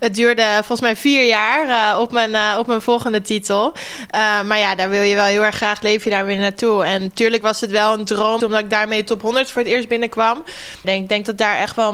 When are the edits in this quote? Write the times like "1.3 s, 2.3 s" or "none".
8.4 s, 10.8 s